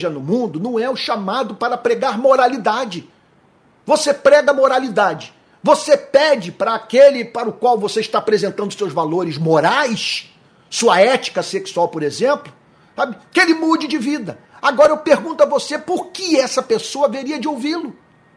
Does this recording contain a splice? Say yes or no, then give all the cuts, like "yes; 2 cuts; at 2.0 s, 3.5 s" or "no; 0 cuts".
no; 0 cuts